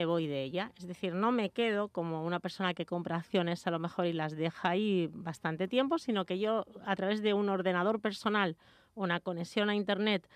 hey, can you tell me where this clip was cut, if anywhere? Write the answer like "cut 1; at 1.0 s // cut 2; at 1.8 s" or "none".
none